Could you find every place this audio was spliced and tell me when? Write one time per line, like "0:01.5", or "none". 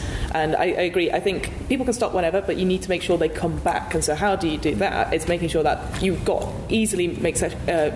none